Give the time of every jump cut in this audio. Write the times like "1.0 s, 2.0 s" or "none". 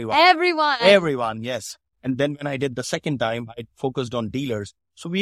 1.9 s